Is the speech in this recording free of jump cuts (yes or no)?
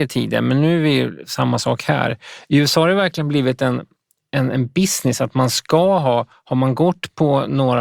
yes